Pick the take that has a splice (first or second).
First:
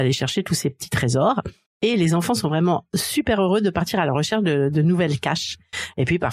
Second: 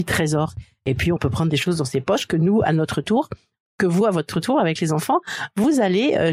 first